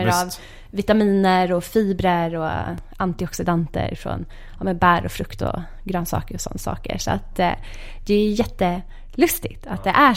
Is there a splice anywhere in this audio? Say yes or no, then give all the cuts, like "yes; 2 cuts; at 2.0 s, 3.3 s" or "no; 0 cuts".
no; 0 cuts